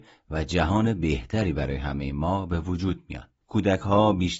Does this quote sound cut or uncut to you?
cut